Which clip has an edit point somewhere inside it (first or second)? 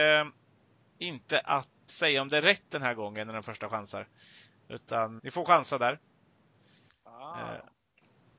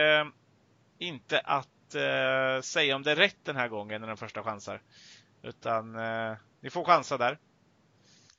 first